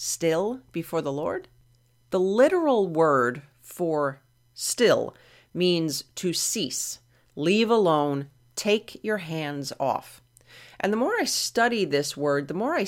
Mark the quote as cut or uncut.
uncut